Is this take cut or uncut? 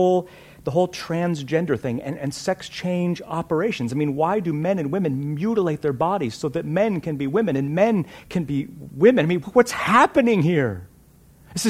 uncut